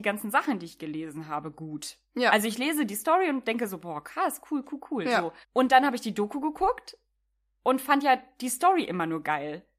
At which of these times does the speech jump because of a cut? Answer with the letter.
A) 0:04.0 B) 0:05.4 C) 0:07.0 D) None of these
B